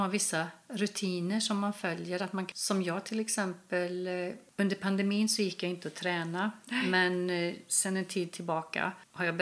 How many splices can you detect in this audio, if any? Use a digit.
0